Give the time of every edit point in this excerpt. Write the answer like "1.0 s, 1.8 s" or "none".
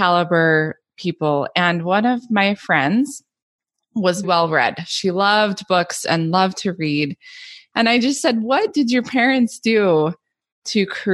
4.2 s, 7.7 s